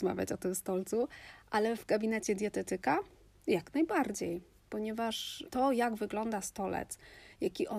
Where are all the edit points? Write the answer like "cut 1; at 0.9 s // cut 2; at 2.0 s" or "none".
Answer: none

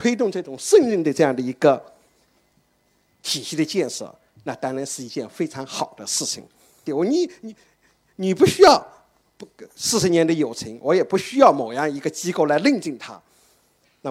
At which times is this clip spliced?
cut 1; at 6.9 s

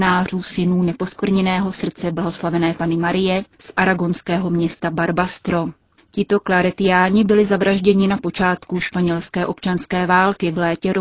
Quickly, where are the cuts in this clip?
none

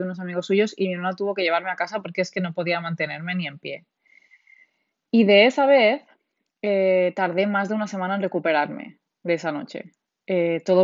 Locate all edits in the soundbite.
none

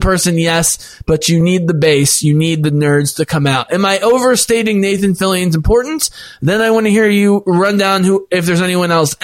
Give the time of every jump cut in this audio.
none

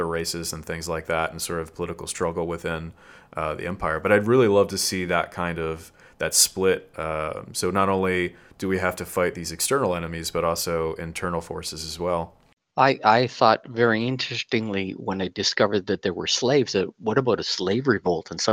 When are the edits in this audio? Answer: none

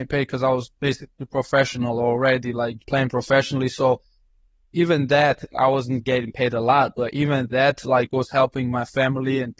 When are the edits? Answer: cut 1; at 2.8 s

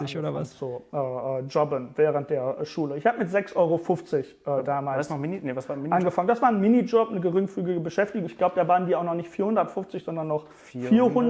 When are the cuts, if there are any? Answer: none

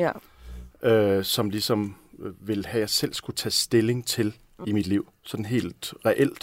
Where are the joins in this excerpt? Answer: cut 1; at 4.6 s

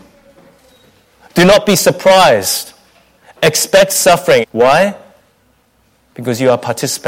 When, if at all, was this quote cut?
cut 1; at 4.4 s

